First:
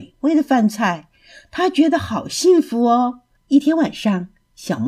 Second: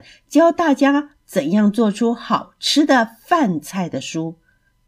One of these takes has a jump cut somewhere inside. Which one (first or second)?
first